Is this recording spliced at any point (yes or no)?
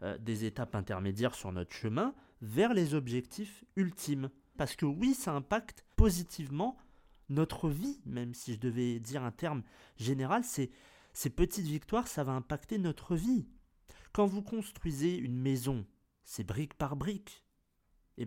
yes